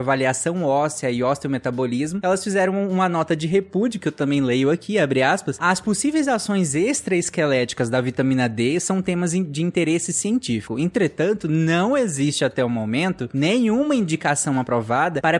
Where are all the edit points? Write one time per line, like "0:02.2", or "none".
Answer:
none